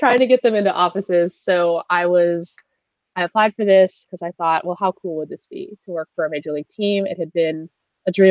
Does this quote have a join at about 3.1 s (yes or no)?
no